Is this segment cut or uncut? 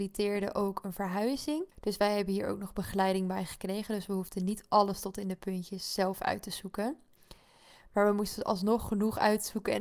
cut